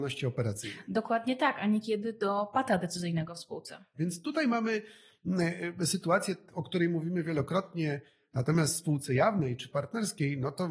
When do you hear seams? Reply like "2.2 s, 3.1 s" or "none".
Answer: 3.9 s, 8.3 s